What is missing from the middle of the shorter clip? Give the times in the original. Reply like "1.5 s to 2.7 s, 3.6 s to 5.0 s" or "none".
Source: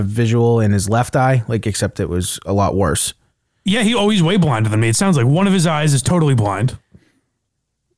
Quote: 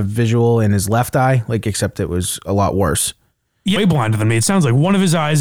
3.8 s to 4.3 s